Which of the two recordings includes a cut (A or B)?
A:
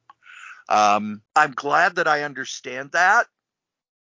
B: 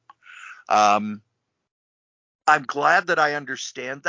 A